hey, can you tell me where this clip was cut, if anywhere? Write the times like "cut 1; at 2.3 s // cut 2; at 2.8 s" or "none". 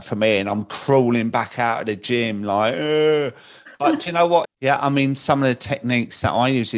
cut 1; at 4.4 s